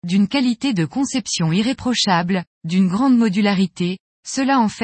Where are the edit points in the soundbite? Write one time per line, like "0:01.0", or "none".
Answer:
none